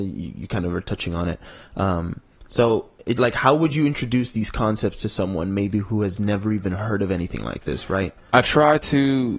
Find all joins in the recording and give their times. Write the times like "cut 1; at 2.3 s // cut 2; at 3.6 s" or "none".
cut 1; at 3.2 s

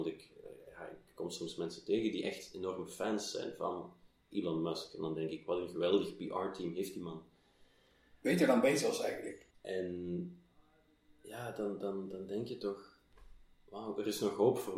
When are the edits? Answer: cut 1; at 9.5 s

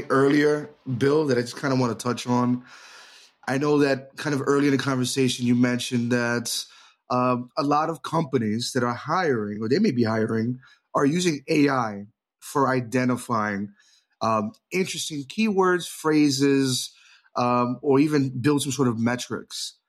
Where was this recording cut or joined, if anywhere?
none

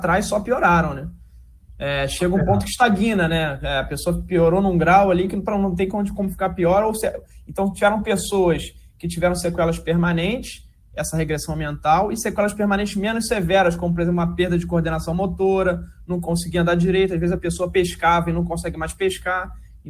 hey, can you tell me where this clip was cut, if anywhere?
none

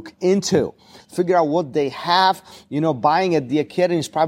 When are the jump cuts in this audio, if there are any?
cut 1; at 1.0 s

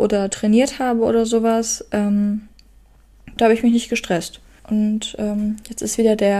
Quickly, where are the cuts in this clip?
cut 1; at 3.4 s // cut 2; at 4.6 s

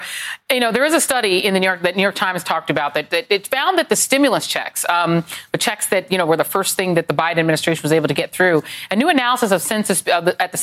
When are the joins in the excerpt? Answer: none

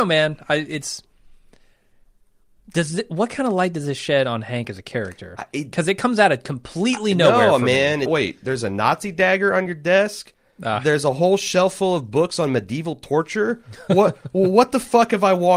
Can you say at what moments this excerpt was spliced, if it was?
cut 1; at 8.1 s

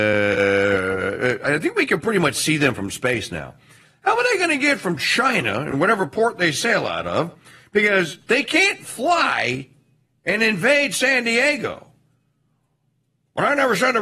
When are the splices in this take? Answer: none

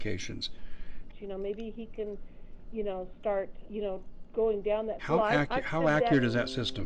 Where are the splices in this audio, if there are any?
cut 1; at 1.1 s // cut 2; at 3.7 s // cut 3; at 5.0 s

